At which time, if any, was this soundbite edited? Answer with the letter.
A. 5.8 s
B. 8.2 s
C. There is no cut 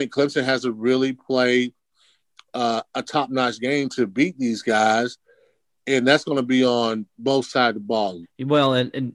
B